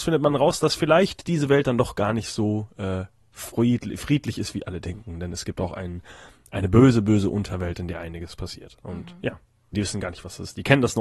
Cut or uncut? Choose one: cut